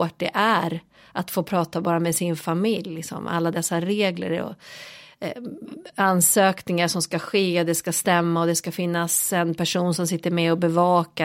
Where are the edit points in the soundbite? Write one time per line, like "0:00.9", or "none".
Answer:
none